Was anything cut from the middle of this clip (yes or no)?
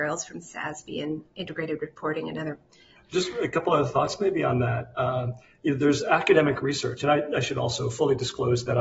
yes